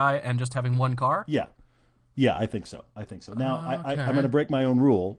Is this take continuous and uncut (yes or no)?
yes